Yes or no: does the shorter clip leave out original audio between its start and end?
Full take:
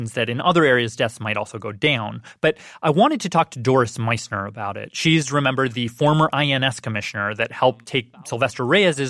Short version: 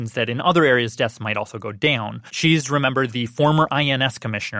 yes